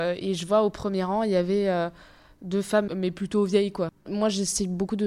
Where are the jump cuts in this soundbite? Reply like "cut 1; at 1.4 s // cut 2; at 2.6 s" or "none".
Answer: cut 1; at 2.9 s // cut 2; at 3.9 s